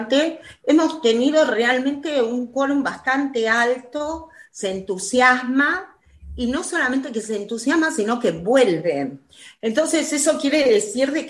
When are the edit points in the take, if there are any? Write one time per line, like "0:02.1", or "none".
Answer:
none